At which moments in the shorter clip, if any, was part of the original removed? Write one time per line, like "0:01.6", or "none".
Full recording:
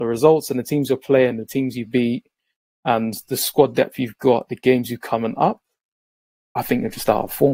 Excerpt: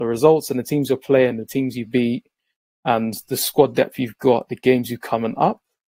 none